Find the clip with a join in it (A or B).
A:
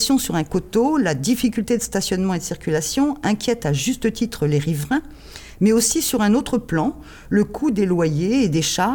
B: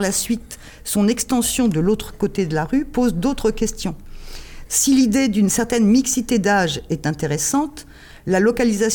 B